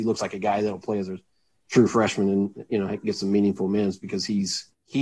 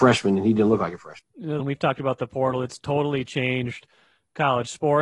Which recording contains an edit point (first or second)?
second